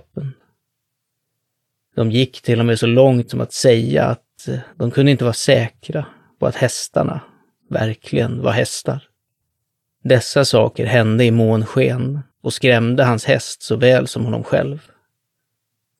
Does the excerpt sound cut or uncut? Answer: cut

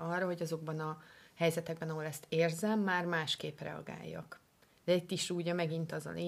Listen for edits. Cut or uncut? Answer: uncut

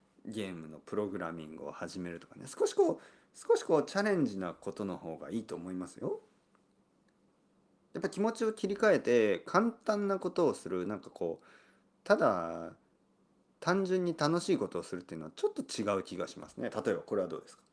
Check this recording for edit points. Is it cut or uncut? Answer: uncut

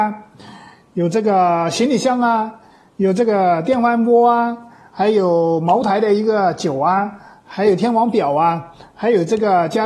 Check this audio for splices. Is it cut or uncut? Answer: uncut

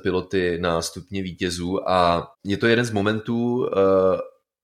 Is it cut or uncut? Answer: cut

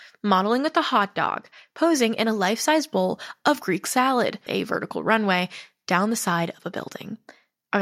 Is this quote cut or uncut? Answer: cut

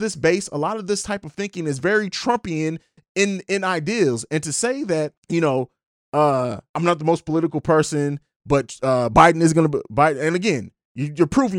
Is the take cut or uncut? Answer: uncut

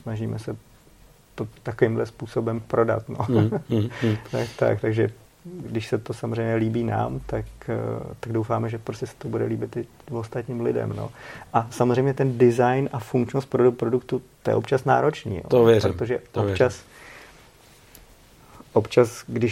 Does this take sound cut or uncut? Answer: uncut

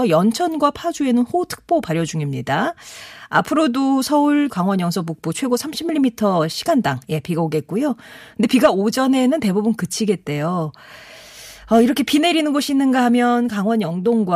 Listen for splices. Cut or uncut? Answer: cut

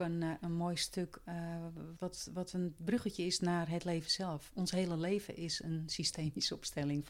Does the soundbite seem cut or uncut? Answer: cut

